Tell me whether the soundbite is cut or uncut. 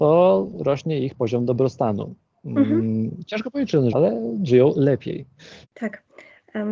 cut